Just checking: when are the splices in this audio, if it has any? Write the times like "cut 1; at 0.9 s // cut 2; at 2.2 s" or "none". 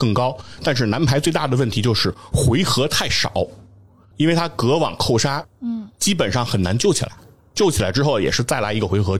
cut 1; at 5.4 s